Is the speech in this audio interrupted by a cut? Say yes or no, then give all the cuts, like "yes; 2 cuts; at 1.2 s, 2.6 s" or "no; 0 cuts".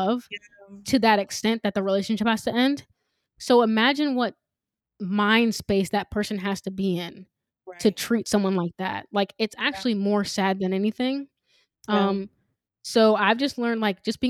no; 0 cuts